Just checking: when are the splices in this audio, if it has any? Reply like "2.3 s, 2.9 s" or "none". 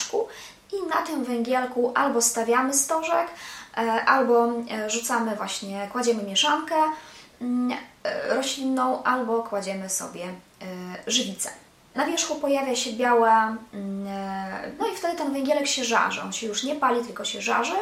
11.9 s, 14.8 s